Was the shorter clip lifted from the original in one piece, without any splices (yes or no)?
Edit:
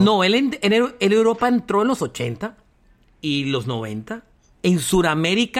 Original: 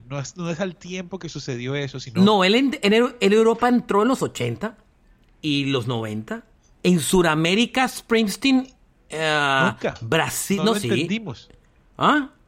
yes